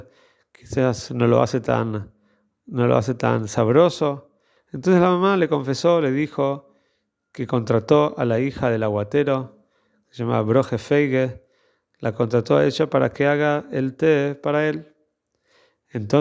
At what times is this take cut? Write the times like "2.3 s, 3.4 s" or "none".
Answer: 4.6 s